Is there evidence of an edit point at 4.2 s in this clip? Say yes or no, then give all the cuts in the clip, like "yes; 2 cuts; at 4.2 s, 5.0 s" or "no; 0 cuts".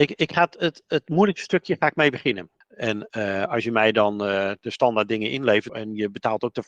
no; 2 cuts; at 2.6 s, 5.7 s